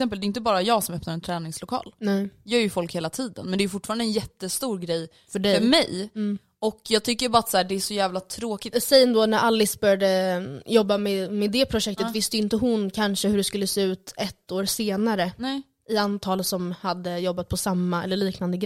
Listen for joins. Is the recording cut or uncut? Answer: cut